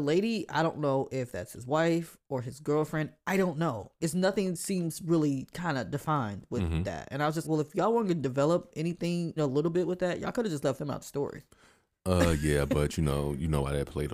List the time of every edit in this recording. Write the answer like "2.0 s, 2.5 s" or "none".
7.4 s, 9.4 s